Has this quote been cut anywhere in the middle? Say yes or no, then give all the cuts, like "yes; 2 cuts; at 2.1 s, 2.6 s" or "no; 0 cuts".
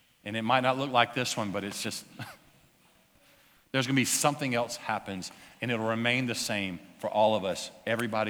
no; 0 cuts